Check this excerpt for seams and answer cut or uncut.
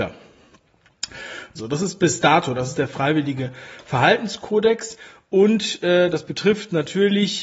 cut